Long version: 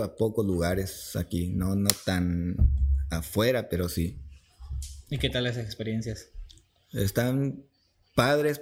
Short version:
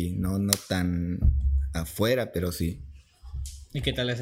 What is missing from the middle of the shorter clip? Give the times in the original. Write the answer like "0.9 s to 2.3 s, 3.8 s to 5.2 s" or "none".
none